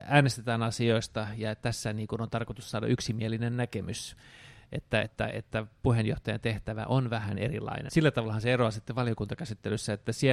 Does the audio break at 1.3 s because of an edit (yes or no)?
no